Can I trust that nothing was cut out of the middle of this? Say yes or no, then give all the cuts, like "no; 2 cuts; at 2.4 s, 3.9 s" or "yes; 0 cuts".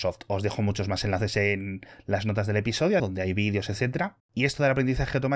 no; 2 cuts; at 3.0 s, 4.2 s